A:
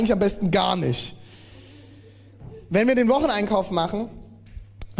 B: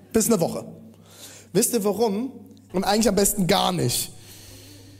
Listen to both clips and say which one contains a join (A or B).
B